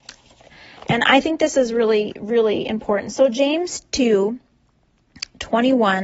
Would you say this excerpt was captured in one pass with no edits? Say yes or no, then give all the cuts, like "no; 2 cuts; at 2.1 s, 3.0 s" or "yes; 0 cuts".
yes; 0 cuts